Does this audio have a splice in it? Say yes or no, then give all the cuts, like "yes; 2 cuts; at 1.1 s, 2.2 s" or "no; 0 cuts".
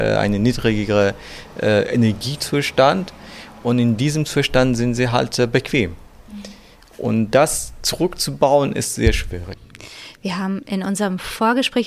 no; 0 cuts